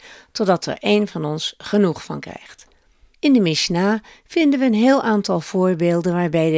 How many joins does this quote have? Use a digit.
1